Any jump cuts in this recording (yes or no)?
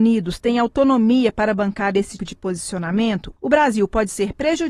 yes